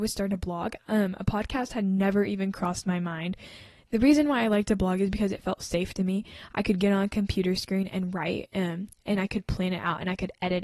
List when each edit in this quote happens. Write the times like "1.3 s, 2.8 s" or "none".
none